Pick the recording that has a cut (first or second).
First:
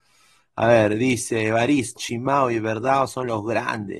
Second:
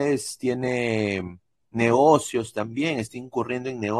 first